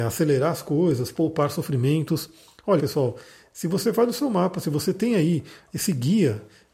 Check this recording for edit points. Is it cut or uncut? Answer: cut